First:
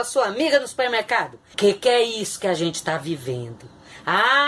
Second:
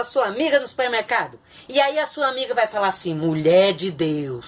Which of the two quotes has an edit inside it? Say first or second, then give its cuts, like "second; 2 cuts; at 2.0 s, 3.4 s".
first; 1 cut; at 1.5 s